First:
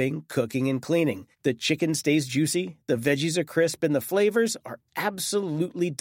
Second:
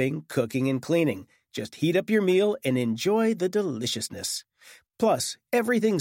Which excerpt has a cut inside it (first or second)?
first